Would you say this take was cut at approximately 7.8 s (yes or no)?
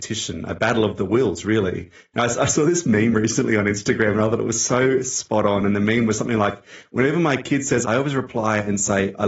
yes